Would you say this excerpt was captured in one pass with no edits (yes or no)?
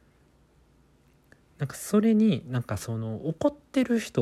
yes